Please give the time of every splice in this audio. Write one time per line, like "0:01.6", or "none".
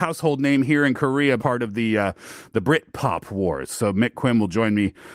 0:01.4